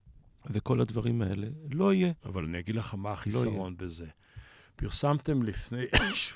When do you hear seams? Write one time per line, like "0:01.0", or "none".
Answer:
none